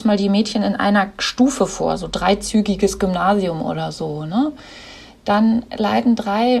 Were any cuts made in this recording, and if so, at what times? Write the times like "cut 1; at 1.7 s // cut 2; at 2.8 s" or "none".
none

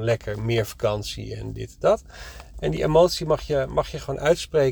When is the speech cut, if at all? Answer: cut 1; at 2.5 s

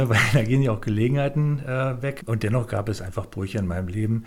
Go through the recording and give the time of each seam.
cut 1; at 2.2 s

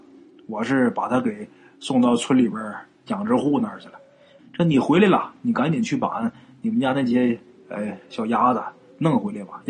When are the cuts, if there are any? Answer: cut 1; at 4.4 s

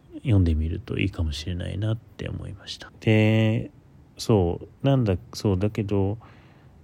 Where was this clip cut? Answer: cut 1; at 2.9 s // cut 2; at 4.8 s

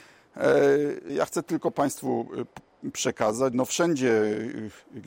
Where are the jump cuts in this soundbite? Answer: cut 1; at 1.1 s // cut 2; at 3.5 s

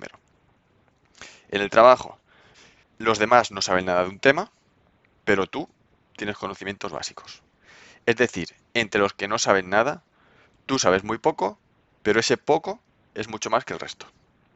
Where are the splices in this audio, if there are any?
none

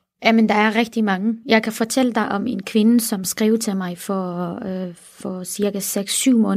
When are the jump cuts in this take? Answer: none

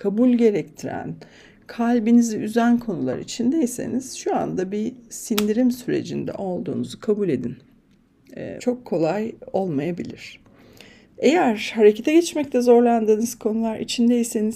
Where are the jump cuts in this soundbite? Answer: cut 1; at 8.6 s // cut 2; at 11.0 s

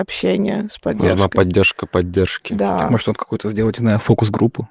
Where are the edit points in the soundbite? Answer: none

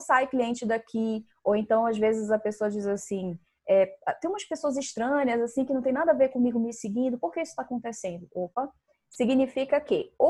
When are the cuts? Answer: none

